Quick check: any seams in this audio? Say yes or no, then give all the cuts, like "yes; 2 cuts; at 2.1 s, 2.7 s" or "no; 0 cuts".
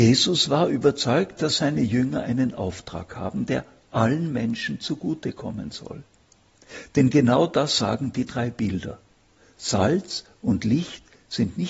no; 0 cuts